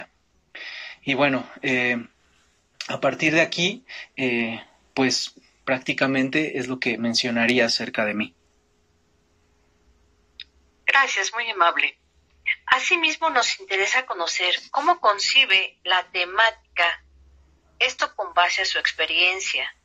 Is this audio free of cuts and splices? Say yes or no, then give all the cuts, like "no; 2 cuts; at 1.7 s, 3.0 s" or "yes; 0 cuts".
yes; 0 cuts